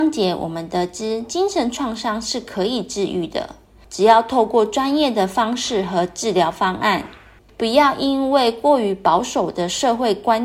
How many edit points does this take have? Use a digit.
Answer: 1